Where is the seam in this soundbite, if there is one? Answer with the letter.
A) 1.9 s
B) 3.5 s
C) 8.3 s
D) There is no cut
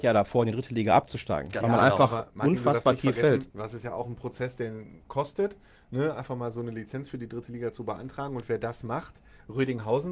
B